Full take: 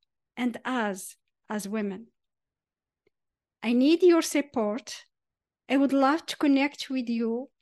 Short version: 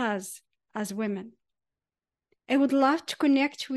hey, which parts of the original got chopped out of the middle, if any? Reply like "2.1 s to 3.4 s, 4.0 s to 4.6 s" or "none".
3.1 s to 5.6 s